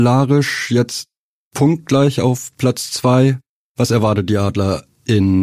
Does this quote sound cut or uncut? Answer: uncut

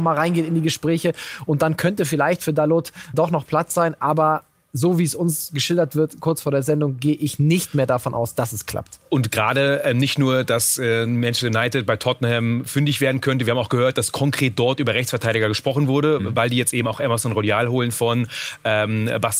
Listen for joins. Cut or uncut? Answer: cut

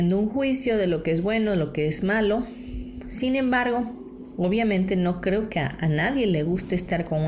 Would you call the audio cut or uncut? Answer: uncut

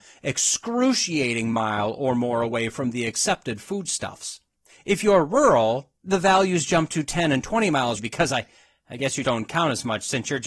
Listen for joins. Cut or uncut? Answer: cut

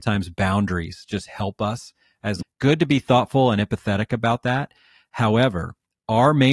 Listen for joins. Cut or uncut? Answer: cut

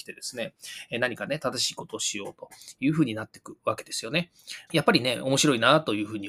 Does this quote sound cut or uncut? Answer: cut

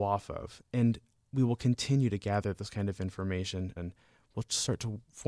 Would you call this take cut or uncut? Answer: cut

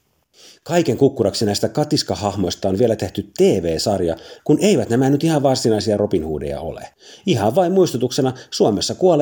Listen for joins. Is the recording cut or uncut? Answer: cut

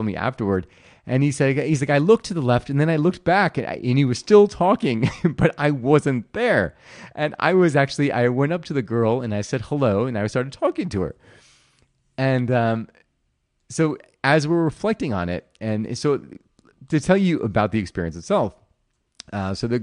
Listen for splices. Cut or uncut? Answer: uncut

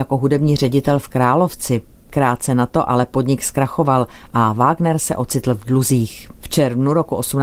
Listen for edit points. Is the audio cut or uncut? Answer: cut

